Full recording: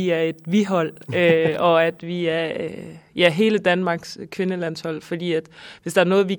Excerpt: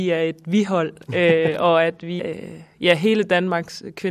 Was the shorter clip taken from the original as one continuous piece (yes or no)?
no